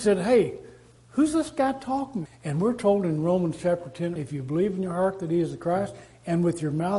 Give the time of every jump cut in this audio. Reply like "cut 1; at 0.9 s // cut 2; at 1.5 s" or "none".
cut 1; at 2.3 s // cut 2; at 4.2 s